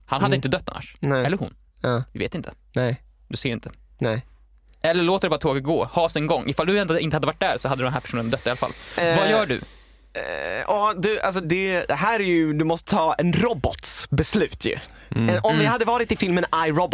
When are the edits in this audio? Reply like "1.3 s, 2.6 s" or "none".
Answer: 11.4 s